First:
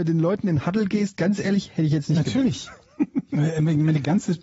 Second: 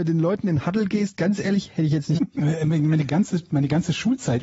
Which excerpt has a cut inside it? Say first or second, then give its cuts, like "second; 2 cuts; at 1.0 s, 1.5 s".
second; 1 cut; at 2.2 s